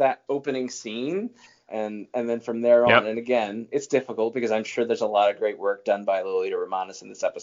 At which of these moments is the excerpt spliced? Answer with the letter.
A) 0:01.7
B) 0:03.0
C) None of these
A